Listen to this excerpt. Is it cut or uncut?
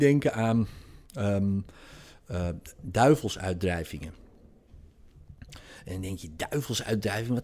uncut